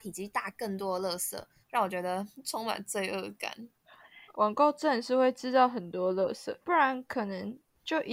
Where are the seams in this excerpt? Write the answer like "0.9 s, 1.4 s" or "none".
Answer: 1.6 s, 4.3 s, 6.6 s